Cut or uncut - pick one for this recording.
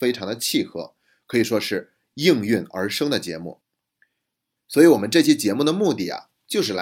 cut